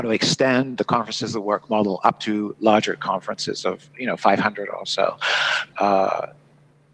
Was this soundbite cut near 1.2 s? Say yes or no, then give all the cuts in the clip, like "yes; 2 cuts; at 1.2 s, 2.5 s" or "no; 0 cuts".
no; 1 cut; at 5.7 s